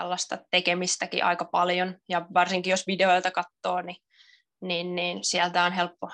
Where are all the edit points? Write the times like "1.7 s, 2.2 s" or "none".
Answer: 2.3 s